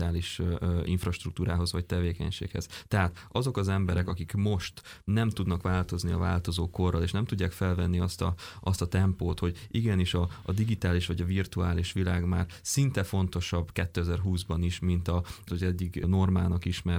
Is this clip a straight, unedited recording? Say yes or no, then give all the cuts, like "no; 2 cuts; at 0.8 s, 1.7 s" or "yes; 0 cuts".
no; 1 cut; at 15.5 s